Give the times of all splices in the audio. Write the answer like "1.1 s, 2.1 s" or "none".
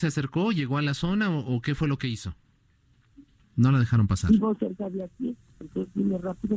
3.4 s

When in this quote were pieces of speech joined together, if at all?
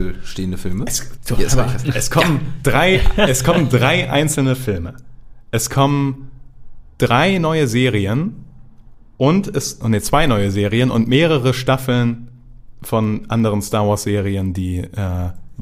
1.2 s, 9.1 s

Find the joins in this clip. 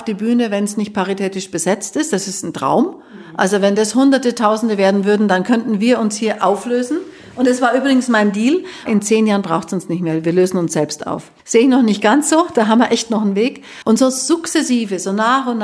11.4 s, 13.8 s

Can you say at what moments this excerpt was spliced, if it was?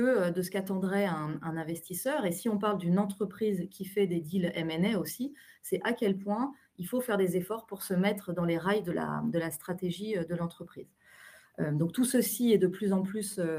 none

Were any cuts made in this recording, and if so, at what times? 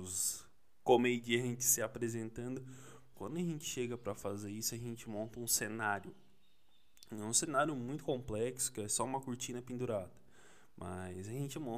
3.1 s

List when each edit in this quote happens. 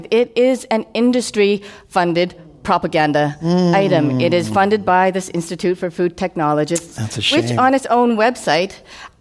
none

